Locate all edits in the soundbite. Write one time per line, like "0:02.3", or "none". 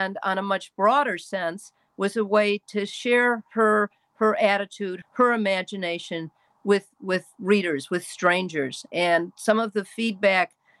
0:05.0